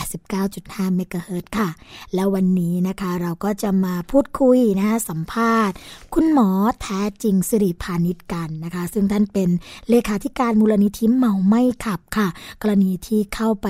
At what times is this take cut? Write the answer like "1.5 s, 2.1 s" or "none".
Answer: none